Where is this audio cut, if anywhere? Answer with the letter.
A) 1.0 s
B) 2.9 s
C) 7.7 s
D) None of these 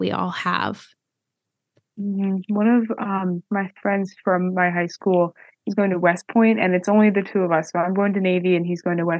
D